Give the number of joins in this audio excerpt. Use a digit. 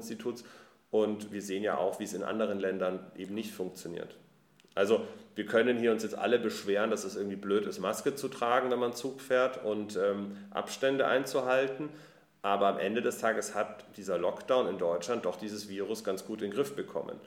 0